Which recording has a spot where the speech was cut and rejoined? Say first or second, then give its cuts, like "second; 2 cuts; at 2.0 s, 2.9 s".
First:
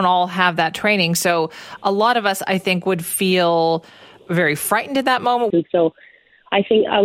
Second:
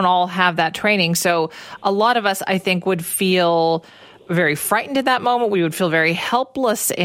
first; 1 cut; at 5.5 s